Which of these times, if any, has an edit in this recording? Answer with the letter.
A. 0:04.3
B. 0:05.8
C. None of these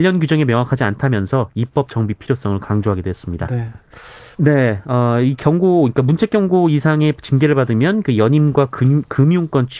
A